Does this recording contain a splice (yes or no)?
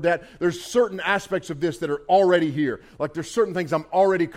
no